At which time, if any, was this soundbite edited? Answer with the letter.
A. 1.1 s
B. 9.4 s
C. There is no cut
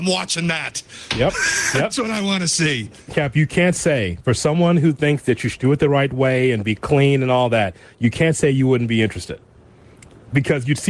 C